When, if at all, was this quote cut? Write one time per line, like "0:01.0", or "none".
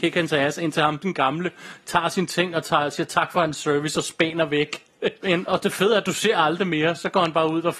0:05.2